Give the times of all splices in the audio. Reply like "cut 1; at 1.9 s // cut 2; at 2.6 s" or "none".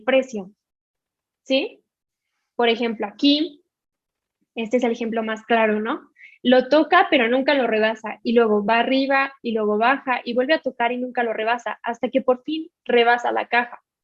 none